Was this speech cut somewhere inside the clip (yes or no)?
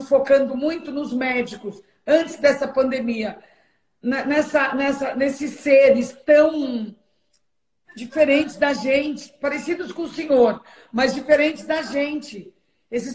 no